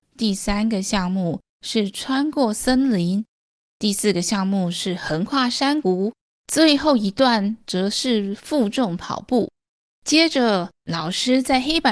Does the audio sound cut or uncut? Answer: cut